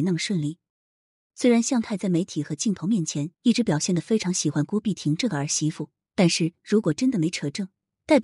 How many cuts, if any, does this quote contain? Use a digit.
2